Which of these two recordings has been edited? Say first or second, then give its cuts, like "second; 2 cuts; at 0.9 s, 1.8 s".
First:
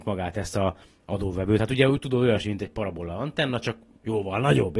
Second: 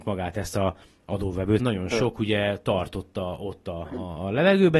second; 2 cuts; at 1.6 s, 3.9 s